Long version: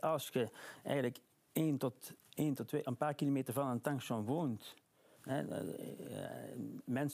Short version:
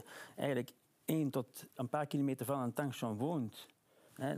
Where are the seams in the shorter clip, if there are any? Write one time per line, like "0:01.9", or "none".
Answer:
0:01.8